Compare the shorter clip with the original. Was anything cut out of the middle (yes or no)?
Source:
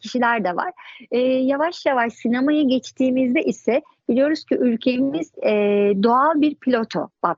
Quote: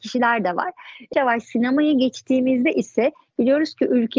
yes